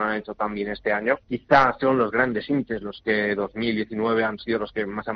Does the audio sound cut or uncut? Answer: cut